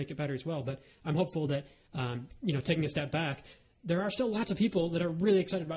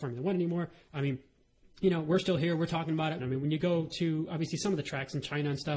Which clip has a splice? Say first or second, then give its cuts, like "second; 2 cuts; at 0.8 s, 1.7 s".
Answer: second; 1 cut; at 3.2 s